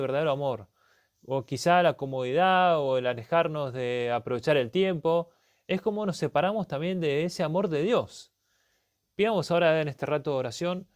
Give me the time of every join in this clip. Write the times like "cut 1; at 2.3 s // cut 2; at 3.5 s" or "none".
none